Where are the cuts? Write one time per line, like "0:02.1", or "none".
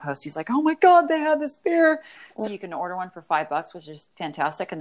0:02.4